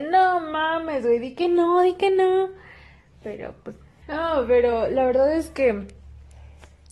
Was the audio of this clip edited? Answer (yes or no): yes